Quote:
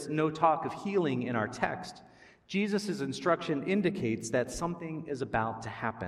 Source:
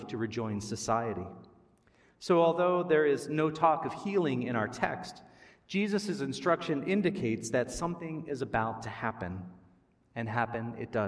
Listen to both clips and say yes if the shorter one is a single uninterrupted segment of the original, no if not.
yes